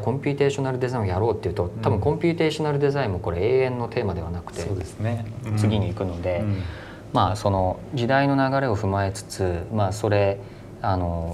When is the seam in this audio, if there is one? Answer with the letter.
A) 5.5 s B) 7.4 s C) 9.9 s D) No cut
A